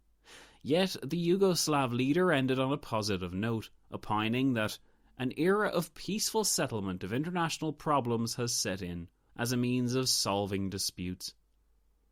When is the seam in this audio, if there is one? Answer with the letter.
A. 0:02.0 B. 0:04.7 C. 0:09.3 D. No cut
C